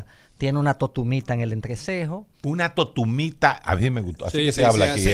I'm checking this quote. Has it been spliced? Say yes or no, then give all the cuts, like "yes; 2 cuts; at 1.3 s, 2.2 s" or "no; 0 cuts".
yes; 1 cut; at 2.3 s